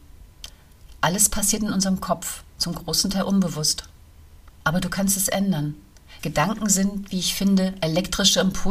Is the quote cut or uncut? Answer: cut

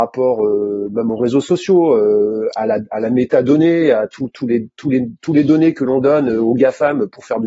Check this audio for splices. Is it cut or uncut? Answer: uncut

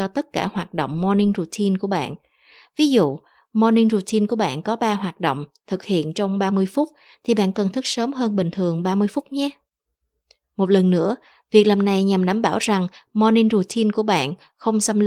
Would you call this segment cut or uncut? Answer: uncut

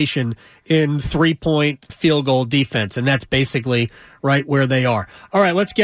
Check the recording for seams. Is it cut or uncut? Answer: cut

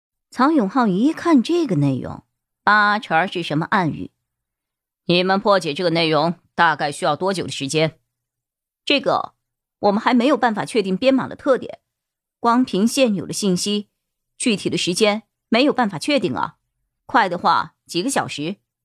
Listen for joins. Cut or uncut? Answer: uncut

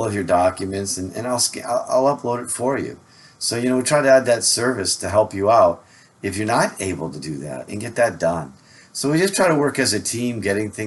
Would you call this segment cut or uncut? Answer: cut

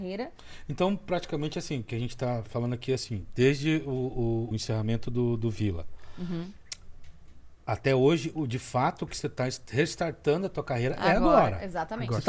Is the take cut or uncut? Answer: cut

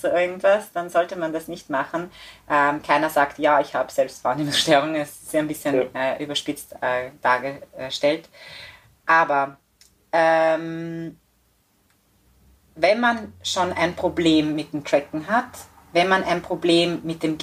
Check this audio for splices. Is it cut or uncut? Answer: uncut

